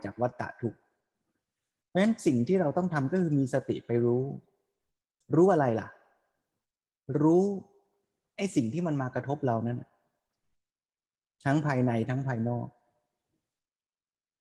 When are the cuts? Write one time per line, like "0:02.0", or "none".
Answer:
none